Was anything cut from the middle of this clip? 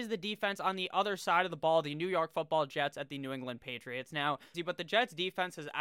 yes; 1 cut; at 4.5 s

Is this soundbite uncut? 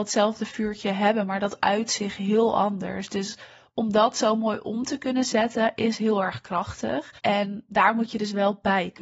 no; 1 cut; at 7.2 s

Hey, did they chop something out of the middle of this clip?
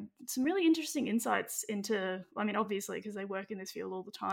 no; 0 cuts

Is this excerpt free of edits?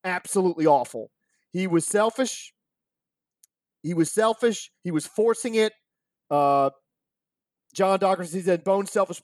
no; 1 cut; at 6.2 s

